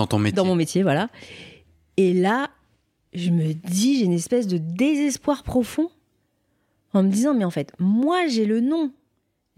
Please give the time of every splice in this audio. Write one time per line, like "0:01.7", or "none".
none